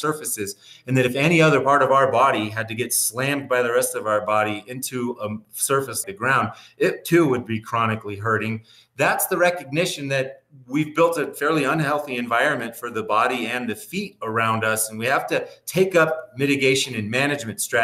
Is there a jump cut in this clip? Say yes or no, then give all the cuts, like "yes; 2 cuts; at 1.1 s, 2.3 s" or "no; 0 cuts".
yes; 1 cut; at 6.0 s